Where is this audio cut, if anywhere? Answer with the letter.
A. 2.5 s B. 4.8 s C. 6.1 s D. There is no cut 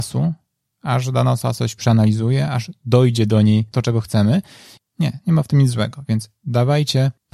B